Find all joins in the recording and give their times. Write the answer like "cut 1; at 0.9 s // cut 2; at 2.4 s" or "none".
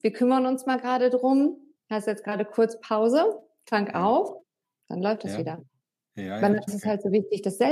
cut 1; at 6.7 s